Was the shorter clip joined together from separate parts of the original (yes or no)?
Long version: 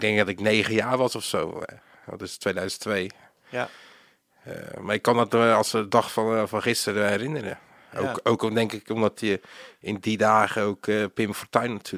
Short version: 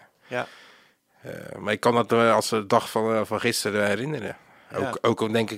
no